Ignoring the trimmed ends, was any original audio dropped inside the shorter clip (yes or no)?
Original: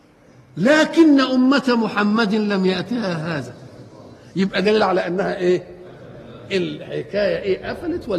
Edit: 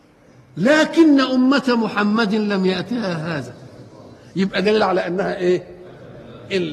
no